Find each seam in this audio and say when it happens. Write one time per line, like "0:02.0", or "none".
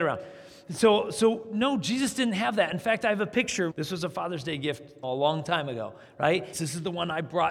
0:03.7
0:05.0
0:06.5